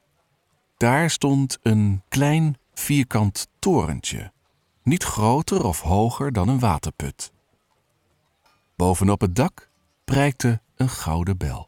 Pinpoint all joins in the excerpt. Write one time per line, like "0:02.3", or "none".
0:08.7